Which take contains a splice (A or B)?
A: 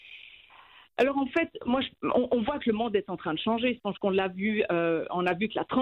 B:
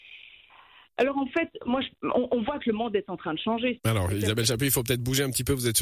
B